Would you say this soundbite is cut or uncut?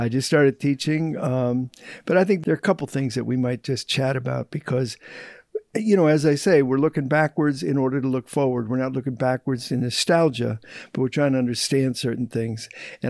uncut